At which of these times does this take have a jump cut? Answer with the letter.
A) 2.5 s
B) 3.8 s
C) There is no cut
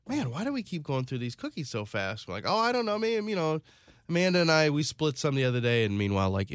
C